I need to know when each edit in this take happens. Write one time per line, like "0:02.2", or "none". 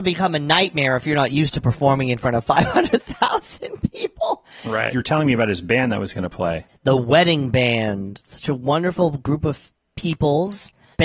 0:04.9

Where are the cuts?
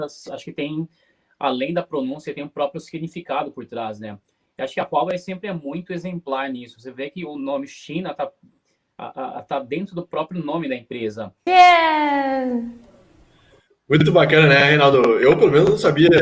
0:11.5

